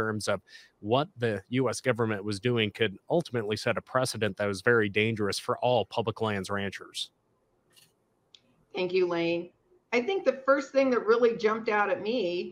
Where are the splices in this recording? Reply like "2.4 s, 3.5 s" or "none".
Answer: none